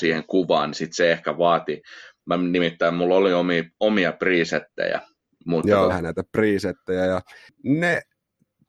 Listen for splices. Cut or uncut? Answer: cut